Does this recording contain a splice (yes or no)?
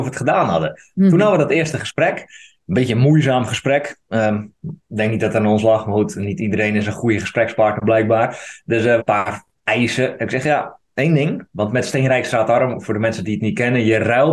yes